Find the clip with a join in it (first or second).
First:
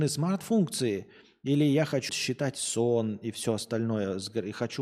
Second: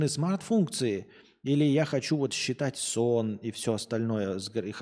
first